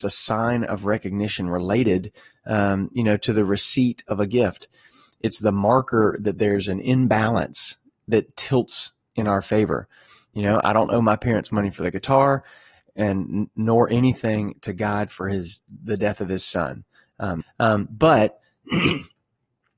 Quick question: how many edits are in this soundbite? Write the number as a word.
one